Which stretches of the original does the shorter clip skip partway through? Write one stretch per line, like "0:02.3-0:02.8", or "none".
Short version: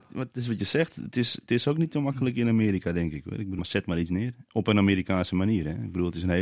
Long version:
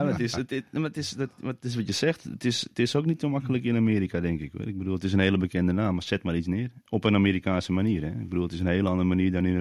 0:04.9-0:06.0